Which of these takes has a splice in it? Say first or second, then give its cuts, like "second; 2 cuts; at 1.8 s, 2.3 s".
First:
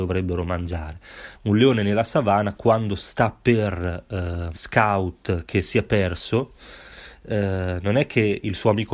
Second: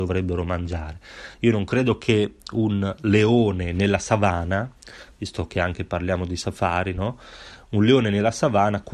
first; 2 cuts; at 1.3 s, 4.5 s